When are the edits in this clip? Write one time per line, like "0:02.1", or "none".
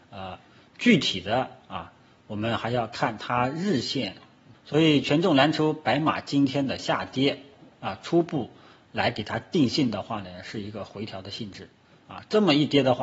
0:04.5